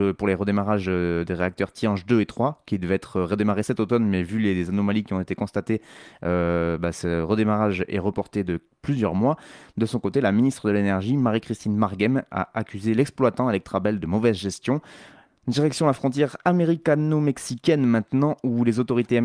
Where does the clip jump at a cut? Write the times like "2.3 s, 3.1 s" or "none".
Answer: 15.3 s